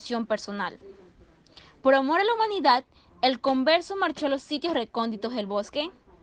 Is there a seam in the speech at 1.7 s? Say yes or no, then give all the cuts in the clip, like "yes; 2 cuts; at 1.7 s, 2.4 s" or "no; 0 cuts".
no; 0 cuts